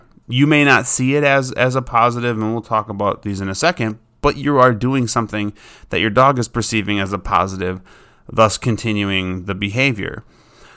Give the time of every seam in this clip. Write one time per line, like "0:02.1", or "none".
none